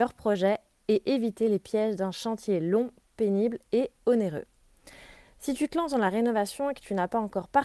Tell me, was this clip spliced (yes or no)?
no